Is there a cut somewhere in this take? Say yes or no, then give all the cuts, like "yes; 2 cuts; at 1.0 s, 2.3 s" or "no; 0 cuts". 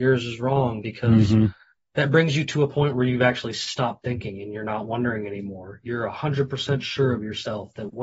no; 0 cuts